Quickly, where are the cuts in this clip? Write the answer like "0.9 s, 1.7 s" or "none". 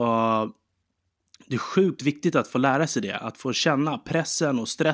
none